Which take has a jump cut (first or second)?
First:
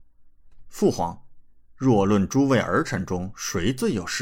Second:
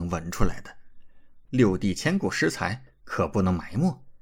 second